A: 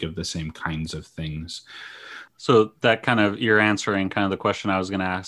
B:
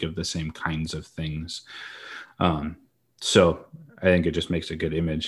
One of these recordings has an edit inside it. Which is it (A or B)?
A